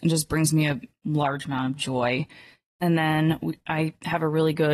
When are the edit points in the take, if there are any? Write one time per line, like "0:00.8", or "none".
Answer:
none